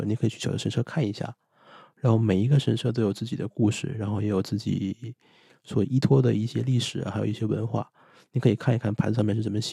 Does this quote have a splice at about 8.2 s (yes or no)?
no